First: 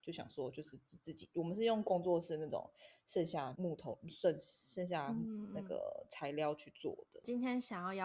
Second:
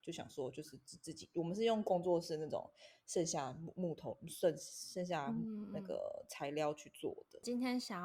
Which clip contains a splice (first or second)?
first